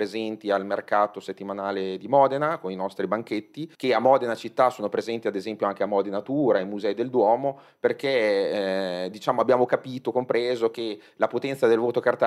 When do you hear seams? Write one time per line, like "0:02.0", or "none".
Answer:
0:03.8